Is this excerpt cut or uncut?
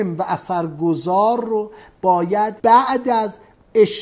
cut